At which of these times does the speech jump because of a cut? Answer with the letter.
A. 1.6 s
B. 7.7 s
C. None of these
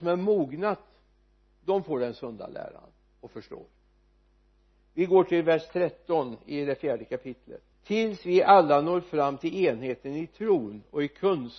B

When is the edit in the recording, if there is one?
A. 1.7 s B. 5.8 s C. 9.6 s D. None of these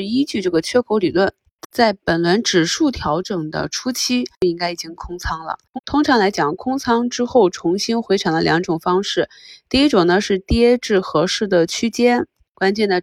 D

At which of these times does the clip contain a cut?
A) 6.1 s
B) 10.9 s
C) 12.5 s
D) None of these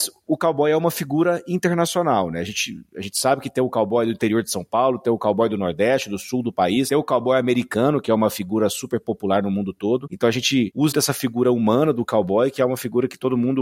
B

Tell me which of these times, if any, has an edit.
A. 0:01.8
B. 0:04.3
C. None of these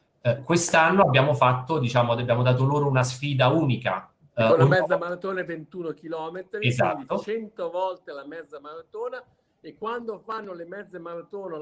B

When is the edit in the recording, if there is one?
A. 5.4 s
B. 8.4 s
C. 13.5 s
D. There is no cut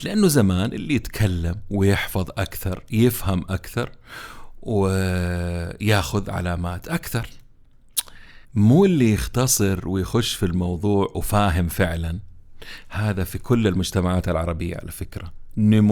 B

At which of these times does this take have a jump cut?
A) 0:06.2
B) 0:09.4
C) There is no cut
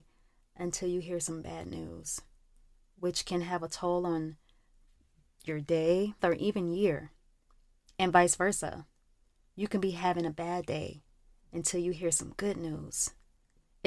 A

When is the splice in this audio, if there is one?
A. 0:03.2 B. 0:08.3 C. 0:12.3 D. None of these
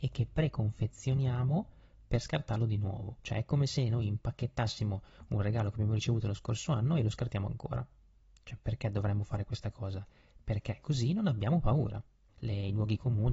C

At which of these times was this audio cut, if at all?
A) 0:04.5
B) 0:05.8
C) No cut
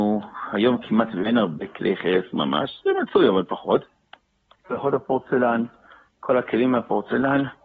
A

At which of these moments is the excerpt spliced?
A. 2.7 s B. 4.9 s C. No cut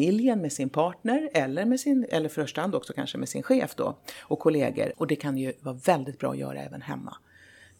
B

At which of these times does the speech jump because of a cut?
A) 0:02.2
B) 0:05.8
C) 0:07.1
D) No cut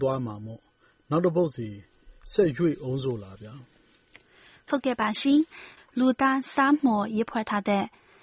B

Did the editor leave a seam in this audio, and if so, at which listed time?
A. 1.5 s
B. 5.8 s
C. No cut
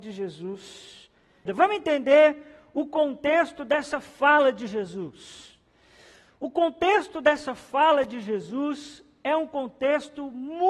A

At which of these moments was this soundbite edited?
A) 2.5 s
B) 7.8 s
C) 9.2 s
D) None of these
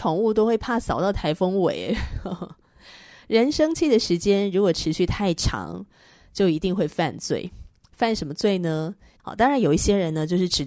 C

